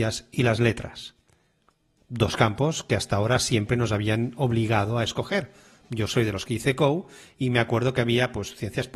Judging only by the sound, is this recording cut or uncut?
uncut